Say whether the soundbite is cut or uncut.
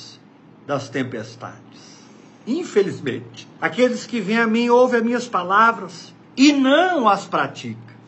cut